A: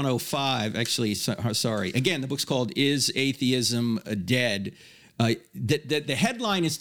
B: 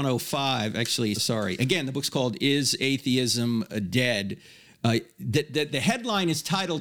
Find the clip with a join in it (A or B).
B